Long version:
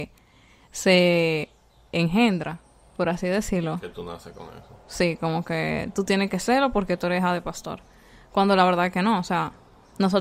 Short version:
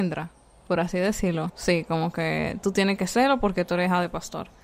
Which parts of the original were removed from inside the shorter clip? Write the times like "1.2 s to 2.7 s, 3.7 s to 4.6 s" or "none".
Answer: 3.8 s to 4.8 s